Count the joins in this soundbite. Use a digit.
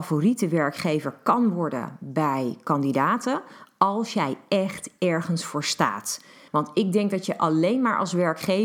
1